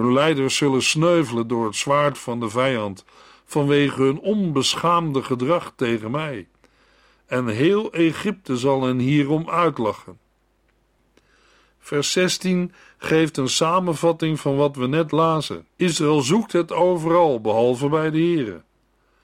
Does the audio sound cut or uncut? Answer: cut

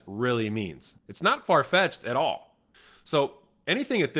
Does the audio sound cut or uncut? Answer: cut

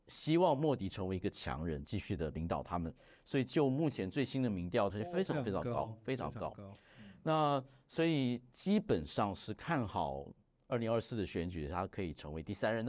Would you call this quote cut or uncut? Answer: cut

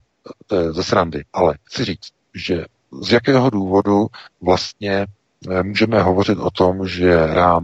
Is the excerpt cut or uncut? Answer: cut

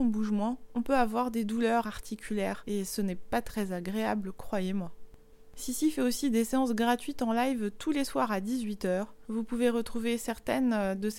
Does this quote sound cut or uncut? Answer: cut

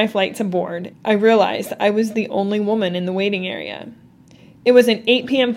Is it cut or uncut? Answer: cut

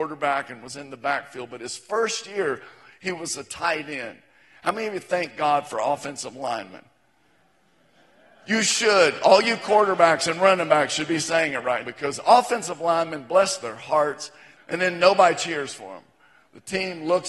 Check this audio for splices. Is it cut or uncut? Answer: cut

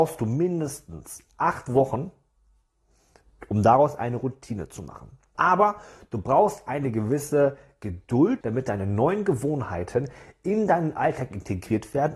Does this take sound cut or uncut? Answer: cut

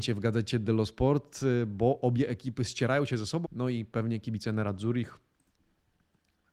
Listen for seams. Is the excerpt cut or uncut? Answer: cut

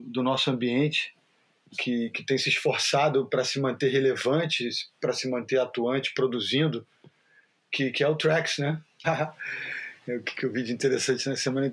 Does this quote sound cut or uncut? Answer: cut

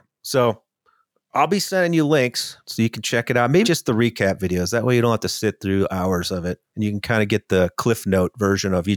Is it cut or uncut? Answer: cut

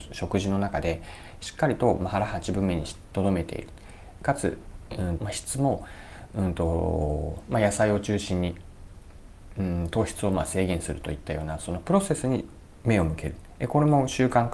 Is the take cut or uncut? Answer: cut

